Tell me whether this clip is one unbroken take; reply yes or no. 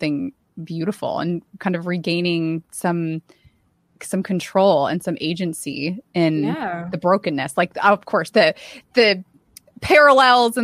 no